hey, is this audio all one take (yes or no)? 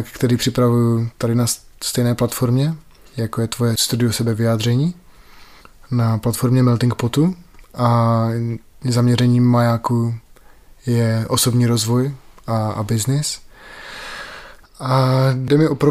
yes